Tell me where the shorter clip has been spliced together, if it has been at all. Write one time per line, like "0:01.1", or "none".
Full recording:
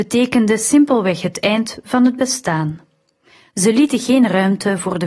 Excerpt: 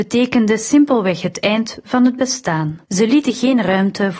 0:02.8